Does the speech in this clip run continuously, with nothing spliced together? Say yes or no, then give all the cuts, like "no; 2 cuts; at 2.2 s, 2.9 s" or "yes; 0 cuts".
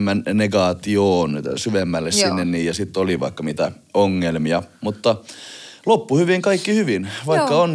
yes; 0 cuts